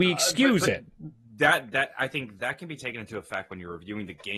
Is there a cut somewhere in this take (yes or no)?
yes